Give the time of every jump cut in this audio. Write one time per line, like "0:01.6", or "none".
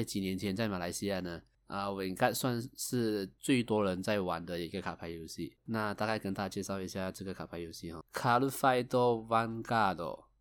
0:05.6
0:08.0